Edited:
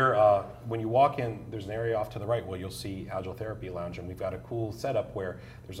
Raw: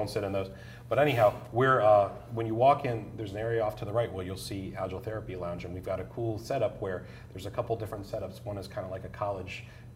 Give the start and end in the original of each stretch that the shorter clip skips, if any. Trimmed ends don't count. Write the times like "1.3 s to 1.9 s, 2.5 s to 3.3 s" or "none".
none